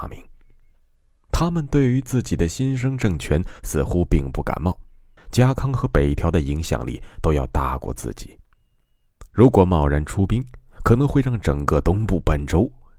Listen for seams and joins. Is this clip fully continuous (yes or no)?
no